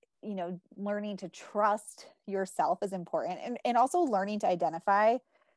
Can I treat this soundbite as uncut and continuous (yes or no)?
yes